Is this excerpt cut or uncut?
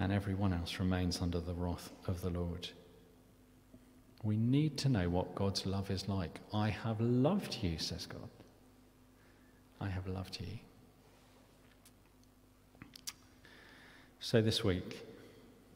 uncut